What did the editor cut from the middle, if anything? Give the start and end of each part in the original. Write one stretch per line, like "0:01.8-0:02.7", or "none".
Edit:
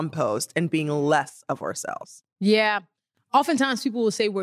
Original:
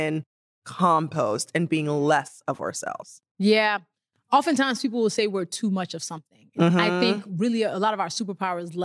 none